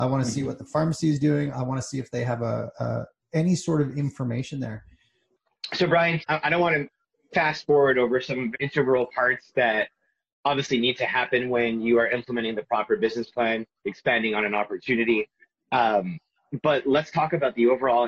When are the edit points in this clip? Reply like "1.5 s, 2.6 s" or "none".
6.2 s, 8.5 s